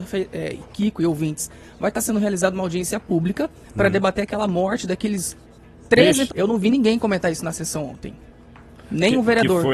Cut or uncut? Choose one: cut